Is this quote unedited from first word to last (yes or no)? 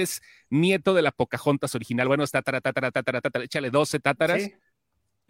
yes